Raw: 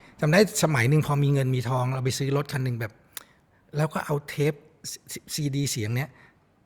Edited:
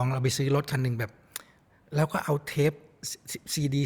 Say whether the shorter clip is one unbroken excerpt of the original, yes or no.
yes